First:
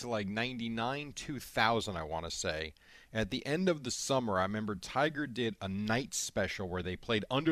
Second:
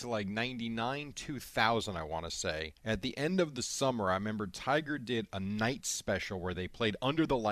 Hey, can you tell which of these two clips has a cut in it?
second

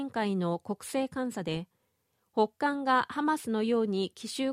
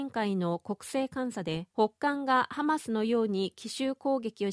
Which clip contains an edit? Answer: second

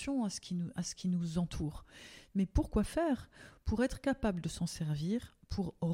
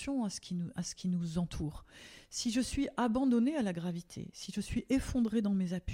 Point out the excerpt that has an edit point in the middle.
first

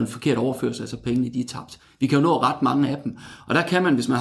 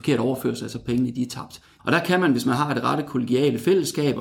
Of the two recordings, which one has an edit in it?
second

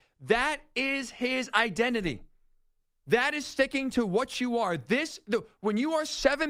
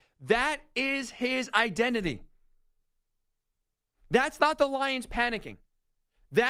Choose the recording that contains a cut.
first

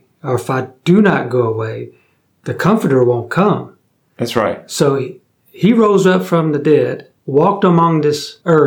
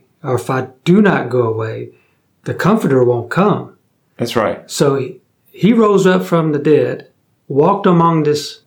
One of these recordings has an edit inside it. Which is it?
first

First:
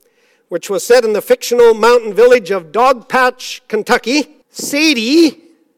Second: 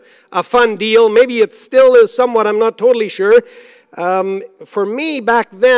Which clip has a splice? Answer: first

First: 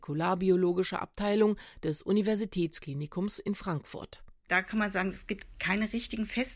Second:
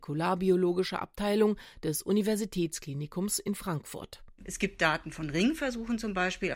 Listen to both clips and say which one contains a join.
second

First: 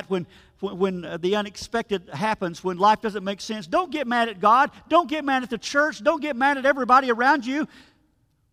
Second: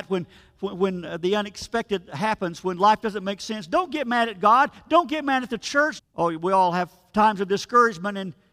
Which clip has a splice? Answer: second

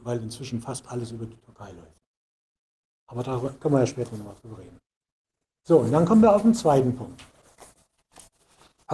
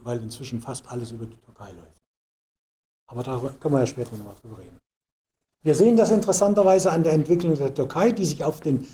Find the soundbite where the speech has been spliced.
second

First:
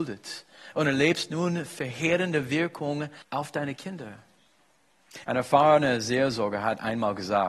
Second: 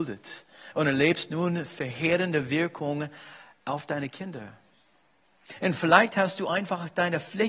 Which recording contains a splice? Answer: first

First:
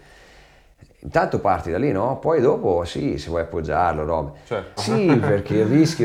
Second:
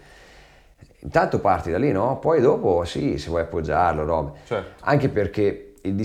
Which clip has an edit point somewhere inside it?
first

